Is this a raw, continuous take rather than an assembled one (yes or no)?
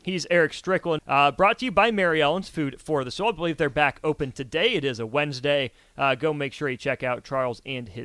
no